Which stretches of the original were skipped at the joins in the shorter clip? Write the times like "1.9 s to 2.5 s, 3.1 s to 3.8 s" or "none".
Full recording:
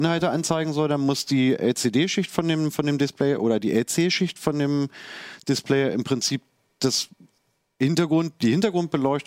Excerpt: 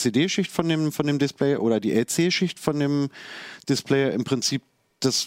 none